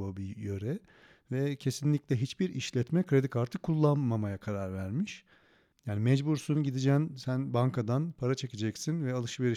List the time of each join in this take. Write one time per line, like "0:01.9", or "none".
0:05.7

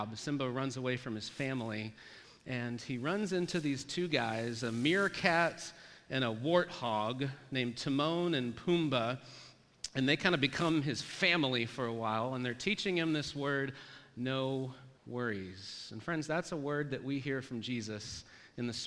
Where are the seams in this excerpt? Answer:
0:15.0

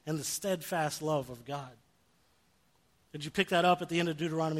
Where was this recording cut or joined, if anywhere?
none

